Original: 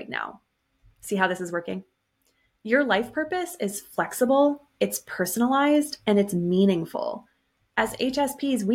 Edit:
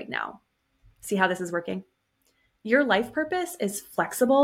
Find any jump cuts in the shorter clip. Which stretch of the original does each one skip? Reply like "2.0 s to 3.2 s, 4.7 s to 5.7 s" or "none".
none